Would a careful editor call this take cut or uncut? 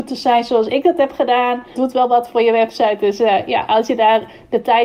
cut